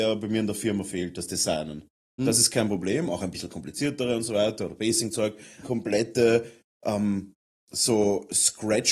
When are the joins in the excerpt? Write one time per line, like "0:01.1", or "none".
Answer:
0:02.2
0:05.6